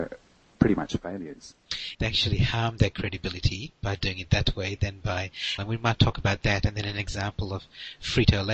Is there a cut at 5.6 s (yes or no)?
yes